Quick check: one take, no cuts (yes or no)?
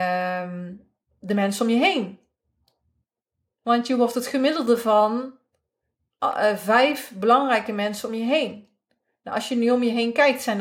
yes